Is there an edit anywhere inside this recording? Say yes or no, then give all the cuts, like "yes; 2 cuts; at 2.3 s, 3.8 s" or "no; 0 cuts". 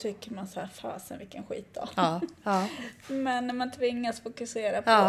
no; 0 cuts